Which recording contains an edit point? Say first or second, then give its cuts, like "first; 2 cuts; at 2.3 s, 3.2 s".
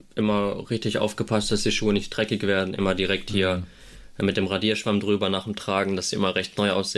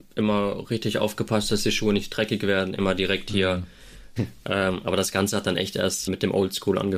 second; 2 cuts; at 4.2 s, 6.1 s